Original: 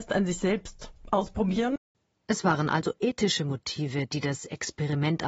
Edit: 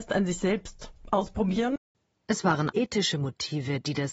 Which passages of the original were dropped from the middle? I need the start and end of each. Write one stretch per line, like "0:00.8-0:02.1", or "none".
0:02.7-0:03.0